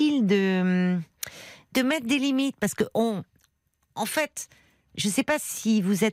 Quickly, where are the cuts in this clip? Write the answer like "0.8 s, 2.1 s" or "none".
1.7 s